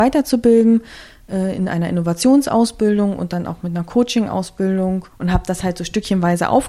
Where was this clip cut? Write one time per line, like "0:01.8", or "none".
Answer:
0:05.1

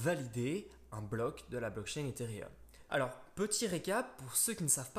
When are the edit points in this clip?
0:02.9

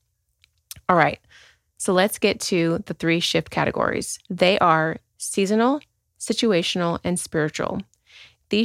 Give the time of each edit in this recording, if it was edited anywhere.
0:04.2

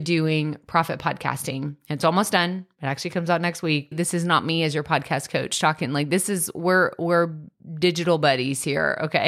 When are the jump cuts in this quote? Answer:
0:03.9

